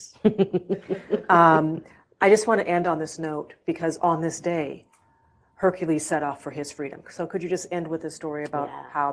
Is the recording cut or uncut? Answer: uncut